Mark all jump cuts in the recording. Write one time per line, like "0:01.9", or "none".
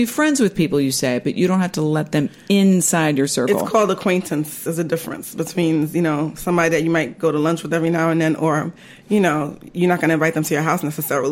none